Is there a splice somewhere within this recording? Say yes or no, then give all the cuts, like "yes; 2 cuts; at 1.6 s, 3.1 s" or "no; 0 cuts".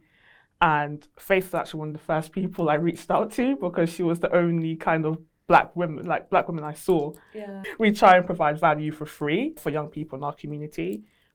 yes; 2 cuts; at 7.6 s, 9.6 s